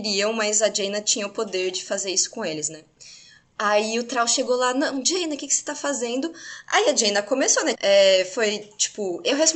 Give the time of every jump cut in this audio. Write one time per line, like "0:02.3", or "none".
0:07.7